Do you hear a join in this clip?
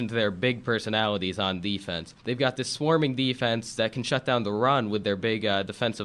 yes; 1 cut; at 2.2 s

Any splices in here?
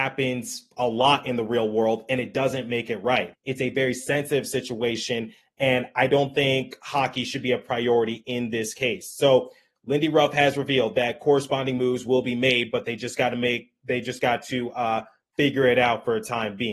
yes; 1 cut; at 3.3 s

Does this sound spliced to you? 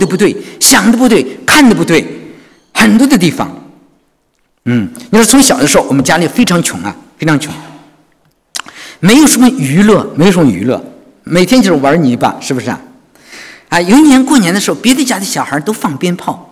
no; 0 cuts

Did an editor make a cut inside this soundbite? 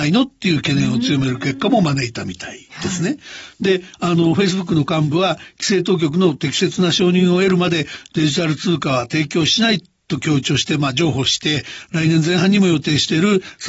no; 0 cuts

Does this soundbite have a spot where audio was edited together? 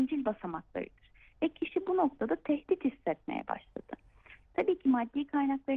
yes; 1 cut; at 4.4 s

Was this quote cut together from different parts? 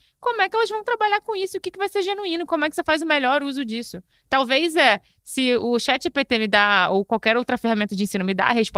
no; 0 cuts

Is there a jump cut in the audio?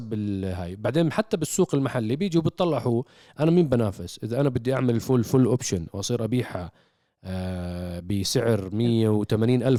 yes; 1 cut; at 5.0 s

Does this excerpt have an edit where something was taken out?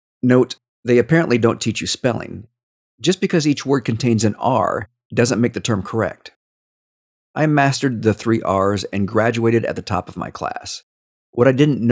no; 0 cuts

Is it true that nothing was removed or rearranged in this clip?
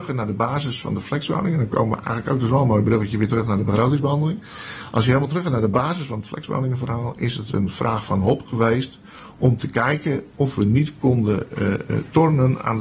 yes; 0 cuts

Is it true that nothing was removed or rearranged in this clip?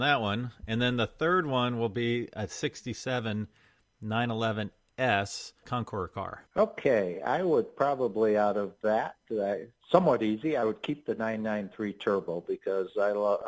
yes; 0 cuts

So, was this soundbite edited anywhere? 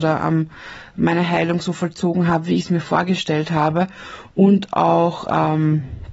no; 0 cuts

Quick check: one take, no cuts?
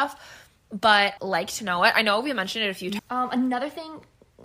no; 2 cuts; at 1.2 s, 3.0 s

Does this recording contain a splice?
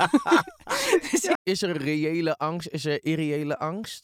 yes; 1 cut; at 1.4 s

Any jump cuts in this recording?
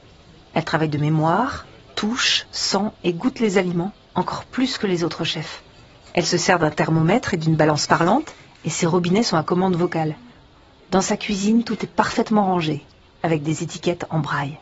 no; 0 cuts

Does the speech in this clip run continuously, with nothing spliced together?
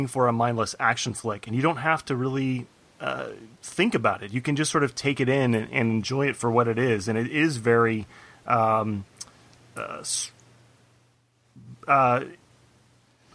yes; 0 cuts

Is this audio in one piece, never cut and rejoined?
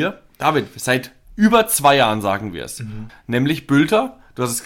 no; 1 cut; at 3.1 s

